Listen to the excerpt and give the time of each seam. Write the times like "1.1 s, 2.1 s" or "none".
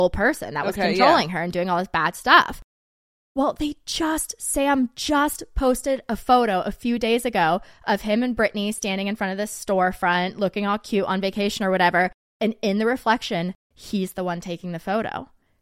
13.7 s